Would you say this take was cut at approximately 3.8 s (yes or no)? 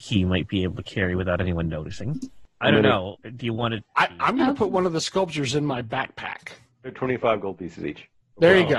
yes